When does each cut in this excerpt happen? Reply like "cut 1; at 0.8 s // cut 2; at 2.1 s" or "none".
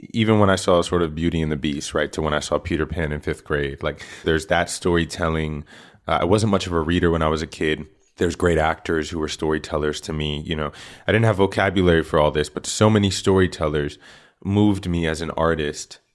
cut 1; at 4.2 s